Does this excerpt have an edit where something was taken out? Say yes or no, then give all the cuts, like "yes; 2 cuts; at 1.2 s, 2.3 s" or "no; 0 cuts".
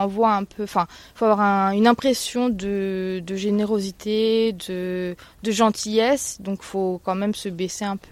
no; 0 cuts